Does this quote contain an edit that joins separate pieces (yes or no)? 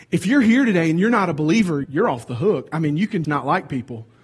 yes